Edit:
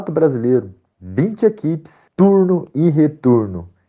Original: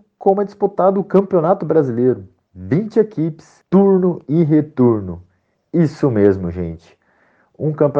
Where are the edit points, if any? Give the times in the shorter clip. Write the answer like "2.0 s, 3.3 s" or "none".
none